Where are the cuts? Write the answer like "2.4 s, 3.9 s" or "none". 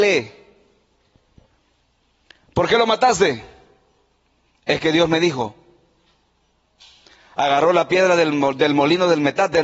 none